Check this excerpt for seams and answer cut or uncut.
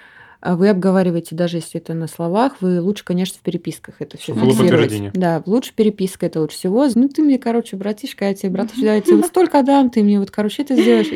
cut